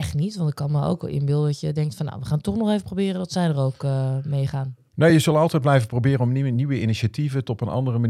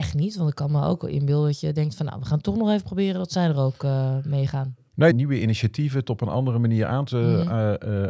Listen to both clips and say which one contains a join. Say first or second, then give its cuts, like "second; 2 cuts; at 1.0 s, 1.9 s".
second; 1 cut; at 5.1 s